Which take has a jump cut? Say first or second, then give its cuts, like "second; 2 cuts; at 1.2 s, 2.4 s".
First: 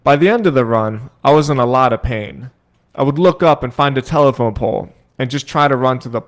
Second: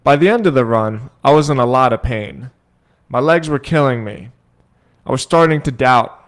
first; 1 cut; at 2.7 s